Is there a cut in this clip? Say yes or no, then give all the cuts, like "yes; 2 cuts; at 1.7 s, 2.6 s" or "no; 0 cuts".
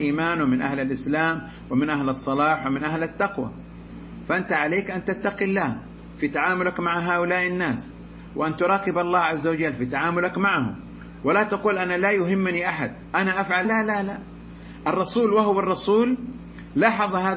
yes; 1 cut; at 13.6 s